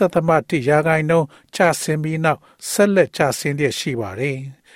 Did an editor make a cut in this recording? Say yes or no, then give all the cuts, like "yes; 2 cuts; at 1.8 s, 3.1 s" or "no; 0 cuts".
no; 0 cuts